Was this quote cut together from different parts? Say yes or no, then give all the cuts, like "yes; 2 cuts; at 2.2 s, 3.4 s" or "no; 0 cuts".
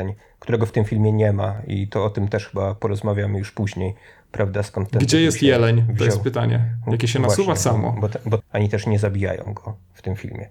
yes; 1 cut; at 8.4 s